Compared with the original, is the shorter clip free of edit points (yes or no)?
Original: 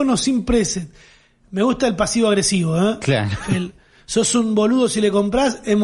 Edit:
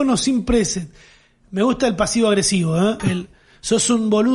no